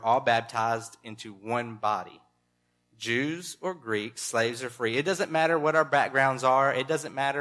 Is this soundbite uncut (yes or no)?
yes